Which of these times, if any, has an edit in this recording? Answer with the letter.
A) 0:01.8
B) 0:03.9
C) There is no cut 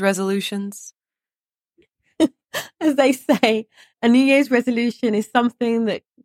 B